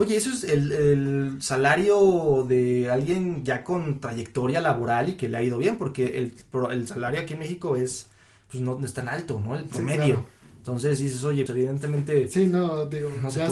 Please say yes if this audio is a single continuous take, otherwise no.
no